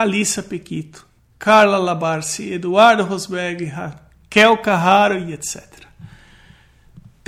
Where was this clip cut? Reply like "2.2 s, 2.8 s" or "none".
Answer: 1.3 s